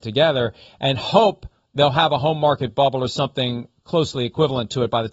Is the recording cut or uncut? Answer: uncut